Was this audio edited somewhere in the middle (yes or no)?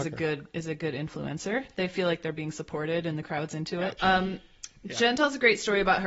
yes